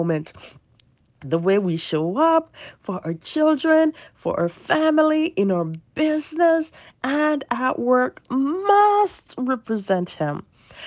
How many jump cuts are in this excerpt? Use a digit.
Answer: 0